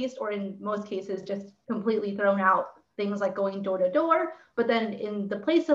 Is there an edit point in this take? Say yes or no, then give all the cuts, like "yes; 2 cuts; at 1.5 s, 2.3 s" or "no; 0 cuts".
no; 0 cuts